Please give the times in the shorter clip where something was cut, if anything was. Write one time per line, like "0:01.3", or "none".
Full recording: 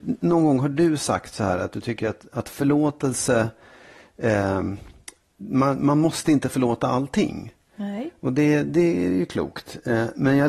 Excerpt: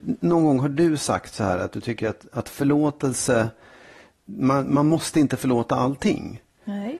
0:04.1